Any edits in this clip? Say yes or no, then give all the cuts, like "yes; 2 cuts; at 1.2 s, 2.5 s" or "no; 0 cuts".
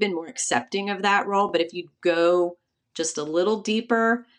no; 0 cuts